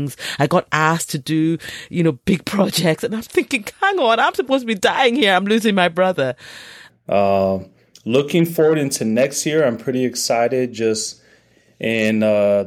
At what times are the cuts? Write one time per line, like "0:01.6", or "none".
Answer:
0:06.9